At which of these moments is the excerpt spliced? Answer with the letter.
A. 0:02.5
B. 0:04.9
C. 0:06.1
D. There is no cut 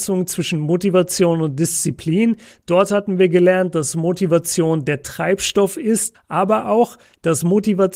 C